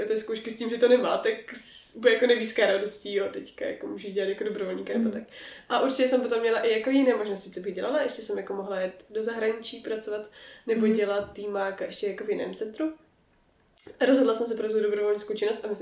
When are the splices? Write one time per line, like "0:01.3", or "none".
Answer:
0:11.3